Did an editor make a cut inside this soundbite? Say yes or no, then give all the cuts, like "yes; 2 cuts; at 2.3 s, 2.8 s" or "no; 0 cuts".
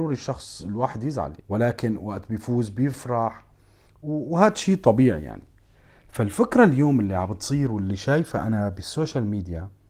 yes; 1 cut; at 1.4 s